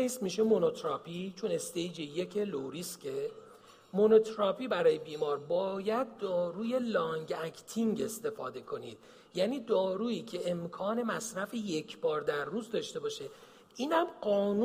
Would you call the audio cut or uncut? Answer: uncut